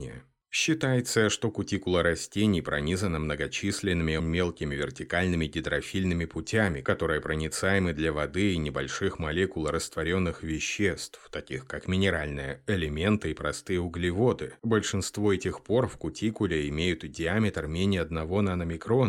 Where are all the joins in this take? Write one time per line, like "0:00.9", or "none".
0:04.2